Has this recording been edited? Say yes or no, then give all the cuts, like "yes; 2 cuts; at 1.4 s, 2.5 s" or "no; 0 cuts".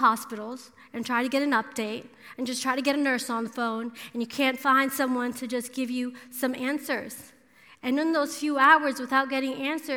no; 0 cuts